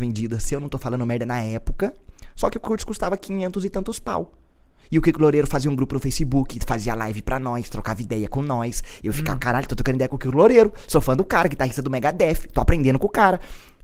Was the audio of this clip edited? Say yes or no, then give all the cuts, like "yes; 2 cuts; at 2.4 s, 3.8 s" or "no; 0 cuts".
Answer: no; 0 cuts